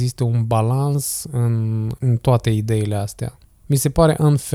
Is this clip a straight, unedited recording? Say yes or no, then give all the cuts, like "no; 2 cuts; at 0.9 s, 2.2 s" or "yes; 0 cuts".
yes; 0 cuts